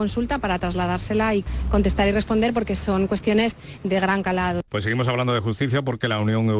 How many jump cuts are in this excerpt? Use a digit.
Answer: 1